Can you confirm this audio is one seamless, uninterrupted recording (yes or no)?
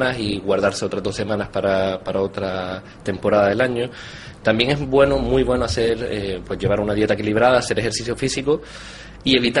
yes